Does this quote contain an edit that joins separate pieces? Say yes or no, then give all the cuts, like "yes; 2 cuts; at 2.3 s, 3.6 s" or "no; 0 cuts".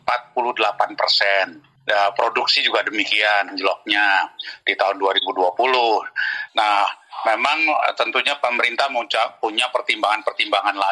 yes; 2 cuts; at 3.5 s, 6.5 s